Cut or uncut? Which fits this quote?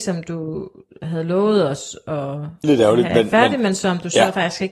cut